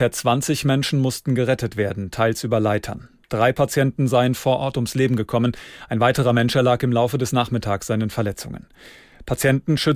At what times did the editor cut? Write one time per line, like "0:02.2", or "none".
0:05.9